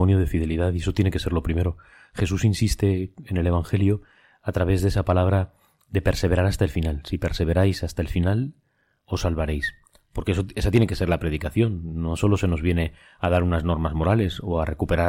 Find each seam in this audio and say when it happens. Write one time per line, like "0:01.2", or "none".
none